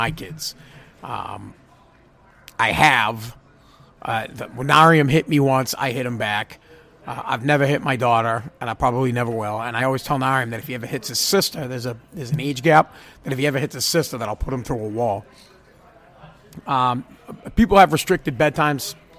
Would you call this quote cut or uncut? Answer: uncut